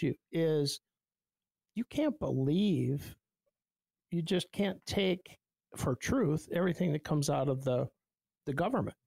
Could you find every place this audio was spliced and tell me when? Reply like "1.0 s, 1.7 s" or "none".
none

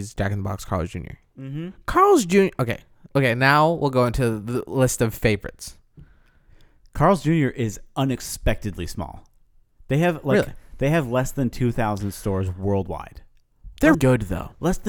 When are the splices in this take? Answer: 13.9 s

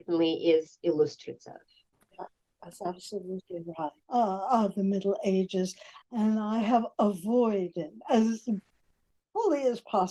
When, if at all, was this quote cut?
4.0 s

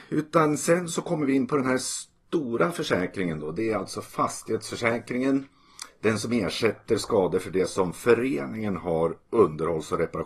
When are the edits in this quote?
none

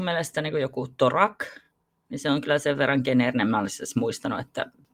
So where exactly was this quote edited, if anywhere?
none

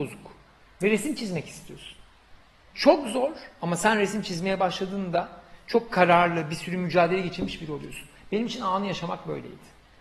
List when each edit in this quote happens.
2.7 s

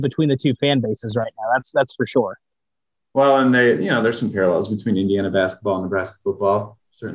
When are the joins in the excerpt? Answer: none

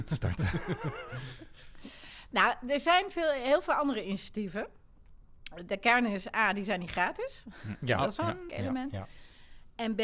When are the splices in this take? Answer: 8.5 s

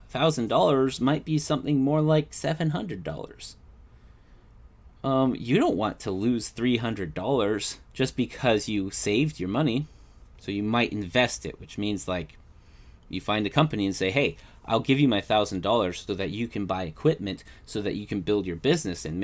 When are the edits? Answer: 7.9 s, 16.1 s

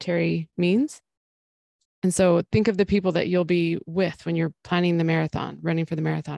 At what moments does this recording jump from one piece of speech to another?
1.9 s

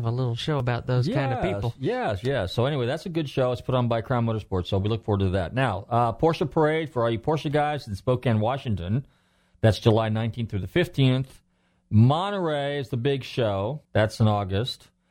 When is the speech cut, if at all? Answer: 13.9 s

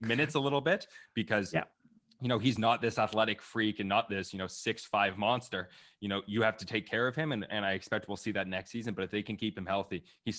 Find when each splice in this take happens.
none

